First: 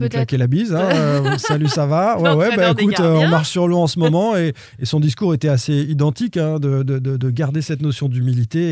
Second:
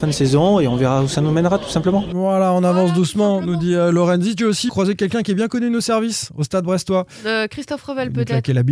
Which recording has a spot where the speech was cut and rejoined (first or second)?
second